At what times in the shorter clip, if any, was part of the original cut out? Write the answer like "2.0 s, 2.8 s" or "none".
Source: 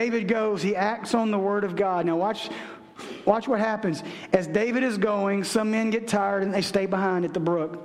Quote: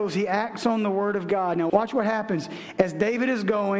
1.7 s